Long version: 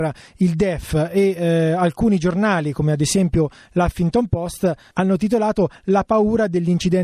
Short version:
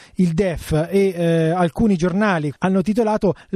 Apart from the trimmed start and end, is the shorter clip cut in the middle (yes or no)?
yes